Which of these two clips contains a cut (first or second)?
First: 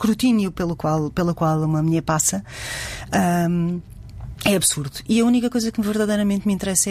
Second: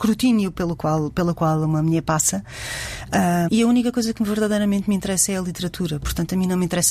second